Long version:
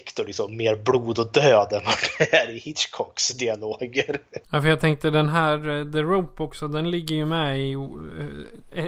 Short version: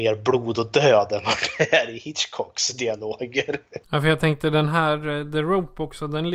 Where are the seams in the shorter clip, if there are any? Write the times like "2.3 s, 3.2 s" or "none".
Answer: none